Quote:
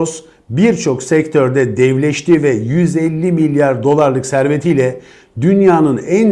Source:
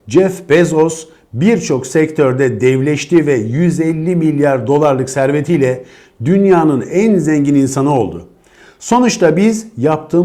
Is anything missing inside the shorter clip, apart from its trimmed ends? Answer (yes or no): no